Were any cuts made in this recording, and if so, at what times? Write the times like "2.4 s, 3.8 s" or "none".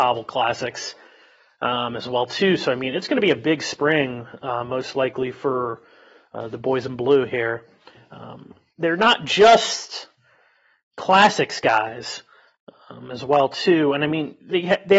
8.7 s